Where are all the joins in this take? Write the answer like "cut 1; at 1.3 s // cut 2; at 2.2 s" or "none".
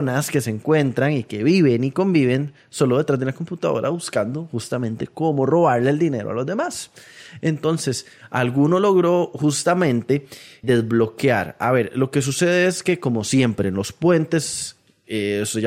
cut 1; at 10.6 s